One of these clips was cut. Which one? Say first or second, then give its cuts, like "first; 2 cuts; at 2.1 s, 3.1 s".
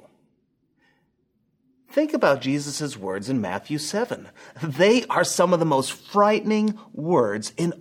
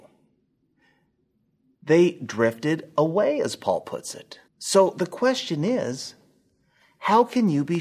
second; 2 cuts; at 1.7 s, 4.5 s